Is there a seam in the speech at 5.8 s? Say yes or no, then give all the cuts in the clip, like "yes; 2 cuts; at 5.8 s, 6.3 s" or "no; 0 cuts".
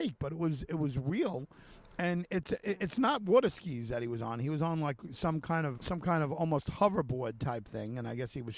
yes; 1 cut; at 5.8 s